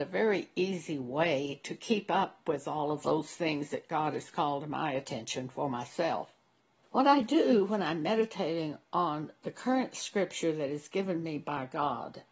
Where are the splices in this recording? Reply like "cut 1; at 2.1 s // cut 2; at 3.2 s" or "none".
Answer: cut 1; at 6.8 s